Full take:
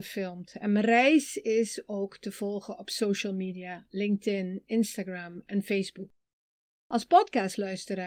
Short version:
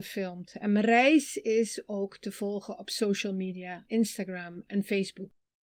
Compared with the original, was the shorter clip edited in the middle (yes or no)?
yes